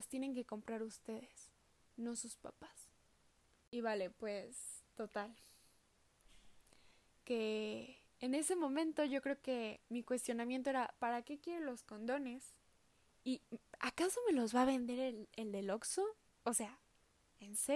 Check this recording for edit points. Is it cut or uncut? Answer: uncut